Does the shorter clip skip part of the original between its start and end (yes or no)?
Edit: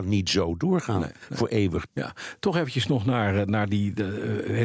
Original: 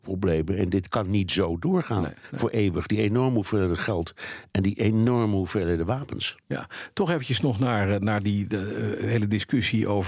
yes